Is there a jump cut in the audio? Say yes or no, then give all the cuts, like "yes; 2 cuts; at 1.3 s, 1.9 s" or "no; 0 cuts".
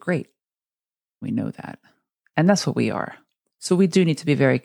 yes; 1 cut; at 1.2 s